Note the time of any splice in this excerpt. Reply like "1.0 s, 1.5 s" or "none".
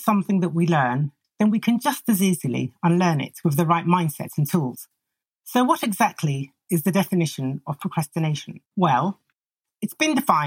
8.7 s